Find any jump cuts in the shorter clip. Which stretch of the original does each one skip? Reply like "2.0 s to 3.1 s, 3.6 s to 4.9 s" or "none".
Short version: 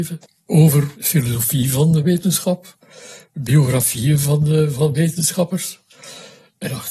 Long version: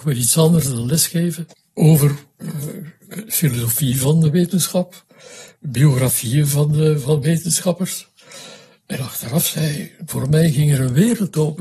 2.2 s to 3.2 s